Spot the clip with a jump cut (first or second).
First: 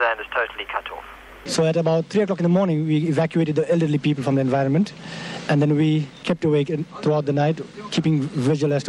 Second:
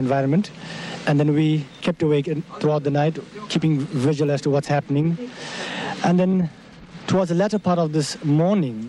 first